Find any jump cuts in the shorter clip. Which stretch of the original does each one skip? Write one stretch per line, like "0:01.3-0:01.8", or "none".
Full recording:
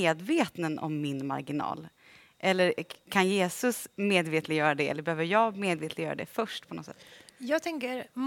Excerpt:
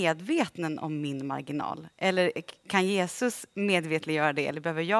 0:01.9-0:02.3